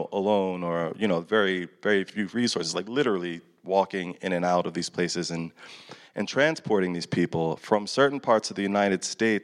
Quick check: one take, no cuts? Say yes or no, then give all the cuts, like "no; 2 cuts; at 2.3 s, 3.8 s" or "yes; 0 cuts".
yes; 0 cuts